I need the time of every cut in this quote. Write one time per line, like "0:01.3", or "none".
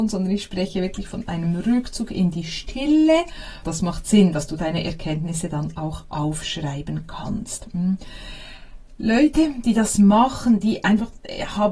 0:03.6